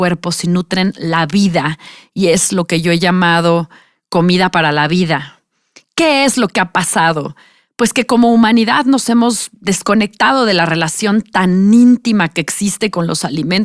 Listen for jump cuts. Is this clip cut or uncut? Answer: uncut